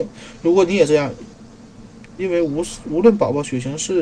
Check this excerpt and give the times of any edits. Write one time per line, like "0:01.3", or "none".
0:02.2